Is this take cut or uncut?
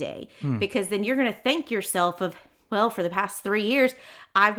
uncut